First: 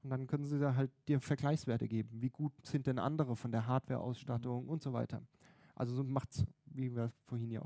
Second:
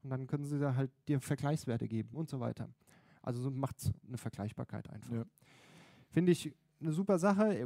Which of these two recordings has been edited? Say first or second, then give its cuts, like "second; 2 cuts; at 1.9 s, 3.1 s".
second; 2 cuts; at 2.1 s, 4.0 s